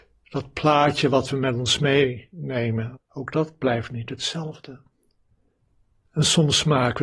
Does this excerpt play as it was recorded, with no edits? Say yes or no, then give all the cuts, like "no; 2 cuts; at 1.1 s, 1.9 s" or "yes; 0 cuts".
no; 2 cuts; at 3.0 s, 6.0 s